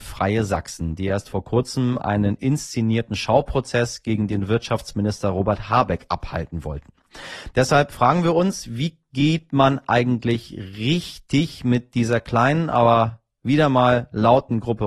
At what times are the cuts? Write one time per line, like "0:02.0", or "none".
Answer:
none